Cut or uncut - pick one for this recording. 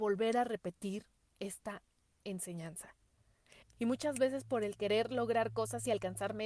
cut